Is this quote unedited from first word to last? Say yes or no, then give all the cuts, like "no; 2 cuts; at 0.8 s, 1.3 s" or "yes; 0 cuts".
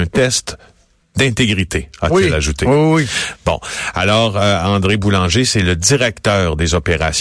yes; 0 cuts